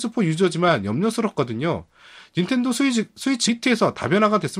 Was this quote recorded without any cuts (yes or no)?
no